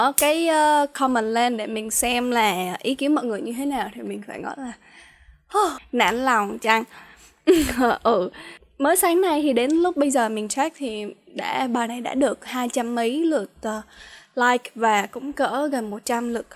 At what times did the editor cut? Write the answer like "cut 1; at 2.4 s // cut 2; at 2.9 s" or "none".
cut 1; at 5.8 s